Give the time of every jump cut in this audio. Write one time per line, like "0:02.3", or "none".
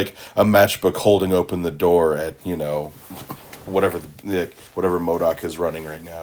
0:02.4